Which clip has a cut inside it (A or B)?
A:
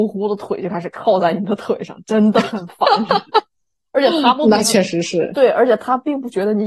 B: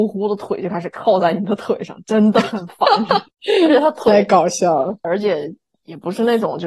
B